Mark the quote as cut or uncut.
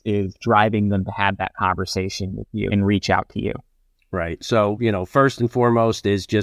cut